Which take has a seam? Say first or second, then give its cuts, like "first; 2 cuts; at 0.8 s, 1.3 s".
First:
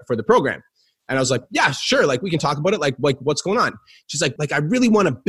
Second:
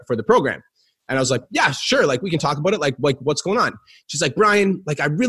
first; 1 cut; at 4.4 s